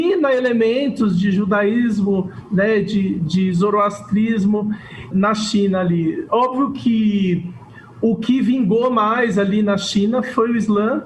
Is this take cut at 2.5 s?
no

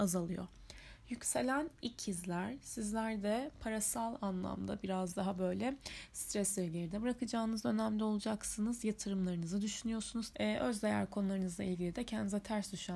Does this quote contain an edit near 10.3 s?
yes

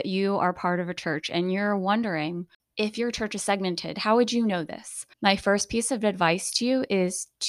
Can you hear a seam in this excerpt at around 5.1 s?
yes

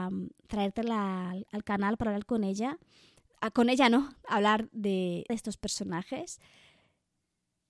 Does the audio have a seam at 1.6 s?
no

